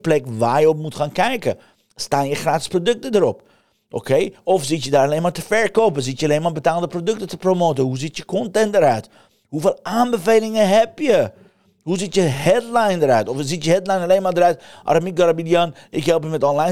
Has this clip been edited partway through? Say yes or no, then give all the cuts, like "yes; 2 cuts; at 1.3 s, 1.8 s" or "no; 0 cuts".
no; 0 cuts